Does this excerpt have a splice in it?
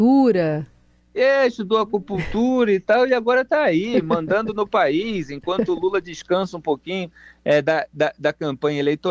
no; 0 cuts

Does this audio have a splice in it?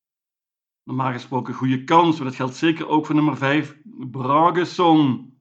no; 0 cuts

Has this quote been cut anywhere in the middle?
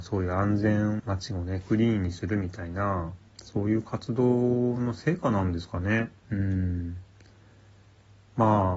yes; 2 cuts; at 1.0 s, 6.2 s

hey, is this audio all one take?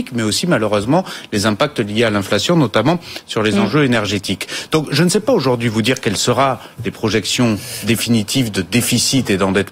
yes; 0 cuts

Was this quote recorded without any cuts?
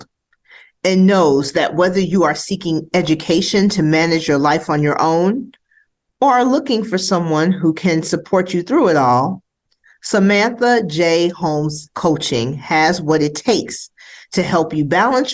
yes; 0 cuts

